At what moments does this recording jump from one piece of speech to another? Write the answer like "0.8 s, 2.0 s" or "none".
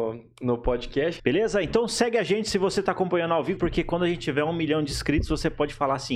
1.2 s, 3.6 s